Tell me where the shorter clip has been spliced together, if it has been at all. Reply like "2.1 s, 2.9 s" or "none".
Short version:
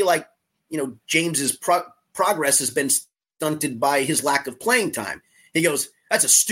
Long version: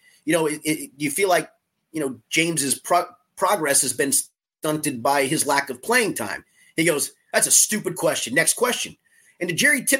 none

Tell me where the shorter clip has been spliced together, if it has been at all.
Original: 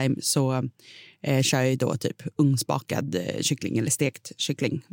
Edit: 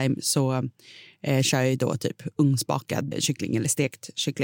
3.1 s

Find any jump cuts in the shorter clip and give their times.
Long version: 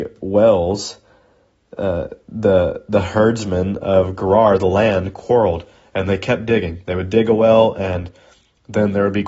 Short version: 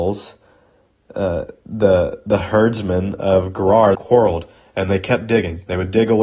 3.9 s

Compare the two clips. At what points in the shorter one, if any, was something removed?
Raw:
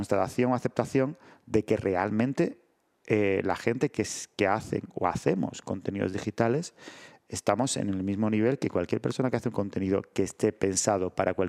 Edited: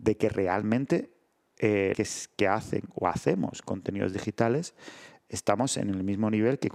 1.9 s

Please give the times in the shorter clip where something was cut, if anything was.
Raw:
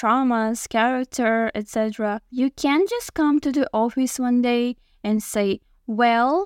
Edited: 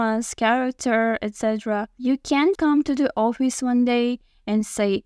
2.5 s

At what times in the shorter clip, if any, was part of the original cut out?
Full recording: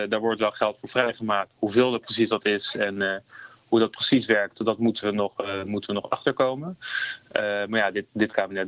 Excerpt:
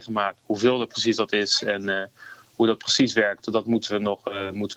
none

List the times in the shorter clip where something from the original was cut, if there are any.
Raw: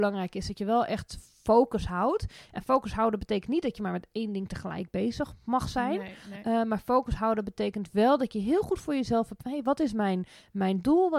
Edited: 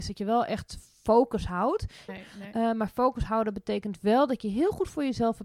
2.1 s

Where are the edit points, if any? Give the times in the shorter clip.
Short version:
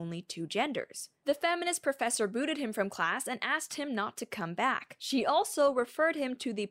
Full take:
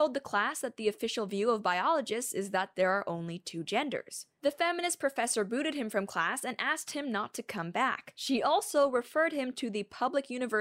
none

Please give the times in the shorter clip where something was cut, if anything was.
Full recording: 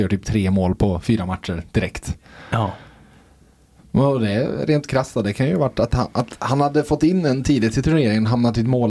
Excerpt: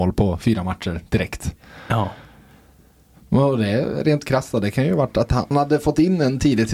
5.5 s

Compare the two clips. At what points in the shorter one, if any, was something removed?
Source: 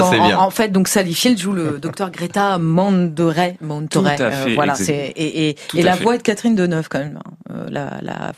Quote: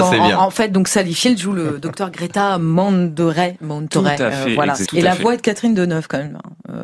4.9 s

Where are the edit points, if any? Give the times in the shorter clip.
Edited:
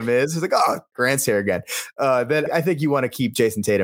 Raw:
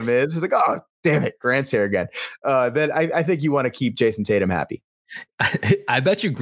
0.9 s, 2.5 s

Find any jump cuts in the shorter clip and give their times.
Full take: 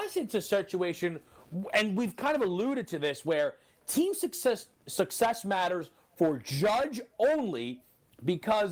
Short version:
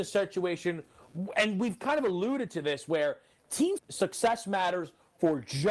3.8 s

